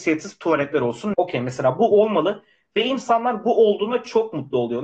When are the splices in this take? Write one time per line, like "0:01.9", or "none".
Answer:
0:01.1